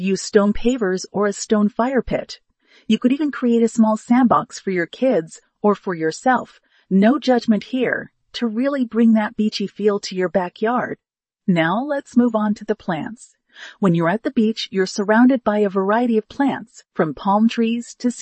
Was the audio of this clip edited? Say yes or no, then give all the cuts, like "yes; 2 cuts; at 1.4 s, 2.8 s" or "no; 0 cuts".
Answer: no; 0 cuts